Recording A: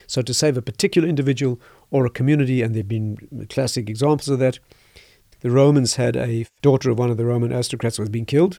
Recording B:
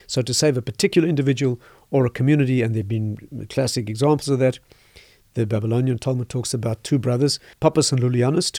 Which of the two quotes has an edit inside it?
A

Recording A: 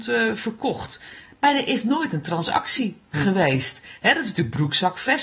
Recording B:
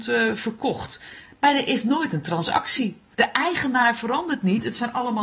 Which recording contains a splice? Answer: B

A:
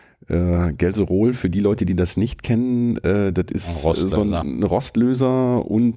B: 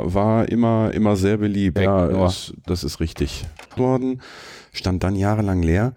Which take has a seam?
B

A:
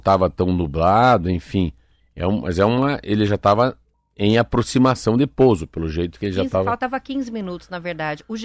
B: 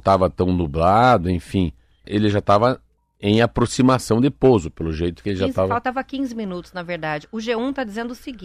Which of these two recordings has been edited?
B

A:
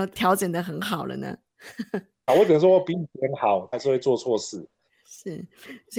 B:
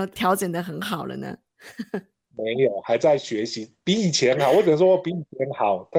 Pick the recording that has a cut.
A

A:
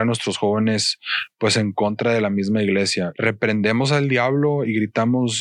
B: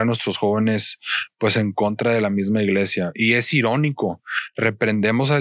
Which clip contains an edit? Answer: A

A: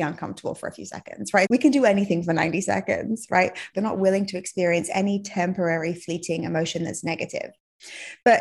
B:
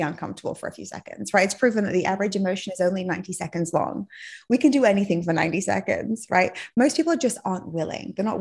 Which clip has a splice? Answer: A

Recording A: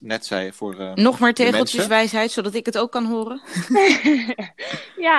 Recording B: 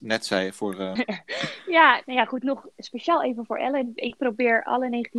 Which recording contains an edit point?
B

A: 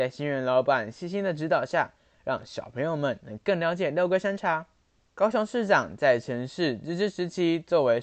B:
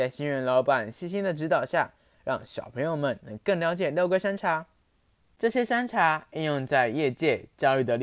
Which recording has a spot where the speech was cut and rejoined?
A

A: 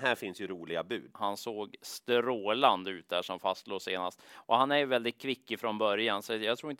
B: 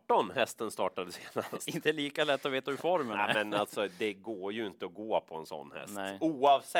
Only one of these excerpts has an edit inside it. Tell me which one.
A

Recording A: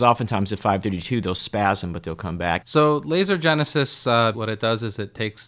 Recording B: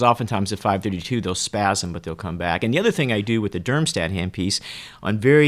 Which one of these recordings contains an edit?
A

